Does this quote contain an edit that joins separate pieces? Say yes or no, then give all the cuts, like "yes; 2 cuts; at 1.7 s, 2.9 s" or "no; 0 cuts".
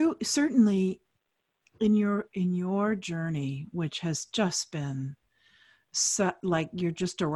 no; 0 cuts